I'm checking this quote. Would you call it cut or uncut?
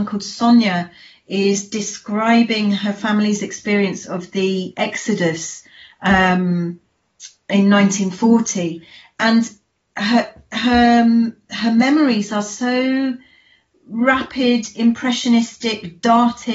uncut